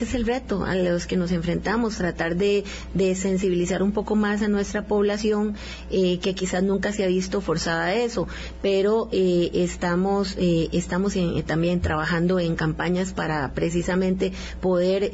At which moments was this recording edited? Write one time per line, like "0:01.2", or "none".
none